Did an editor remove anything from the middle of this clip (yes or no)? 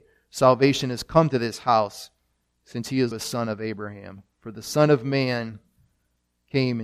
yes